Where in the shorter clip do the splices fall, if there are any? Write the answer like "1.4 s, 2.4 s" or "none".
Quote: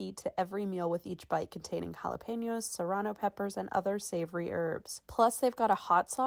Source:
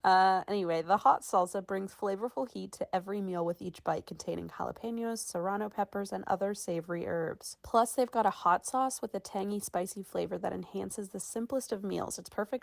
none